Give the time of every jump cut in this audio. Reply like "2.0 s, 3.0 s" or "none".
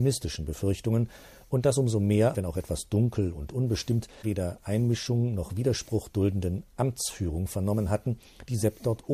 2.3 s, 4.2 s